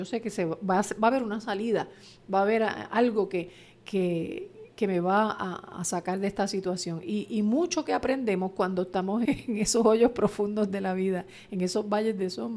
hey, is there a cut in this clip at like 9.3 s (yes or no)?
yes